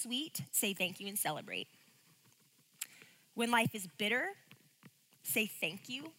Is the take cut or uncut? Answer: uncut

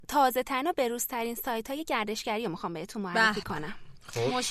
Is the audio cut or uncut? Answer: uncut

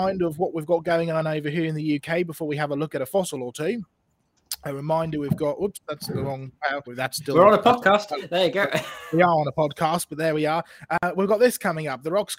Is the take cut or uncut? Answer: cut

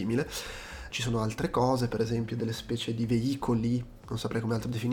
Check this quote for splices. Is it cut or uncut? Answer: cut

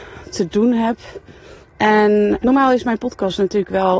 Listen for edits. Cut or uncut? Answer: cut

